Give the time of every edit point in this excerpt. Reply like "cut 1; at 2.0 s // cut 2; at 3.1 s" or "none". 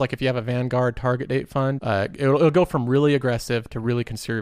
cut 1; at 1.8 s